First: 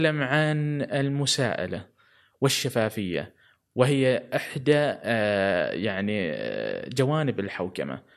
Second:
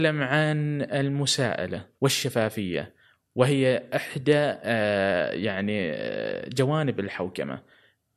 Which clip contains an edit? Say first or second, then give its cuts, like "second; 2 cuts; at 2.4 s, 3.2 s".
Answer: second; 1 cut; at 1.9 s